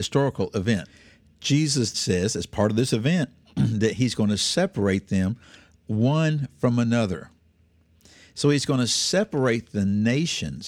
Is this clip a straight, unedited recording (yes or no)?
no